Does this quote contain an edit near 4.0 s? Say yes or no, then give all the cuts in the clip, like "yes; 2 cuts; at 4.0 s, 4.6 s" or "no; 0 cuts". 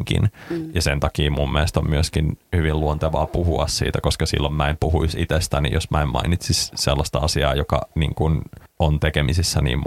no; 0 cuts